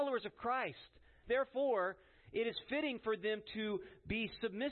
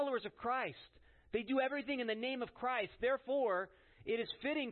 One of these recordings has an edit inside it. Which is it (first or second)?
first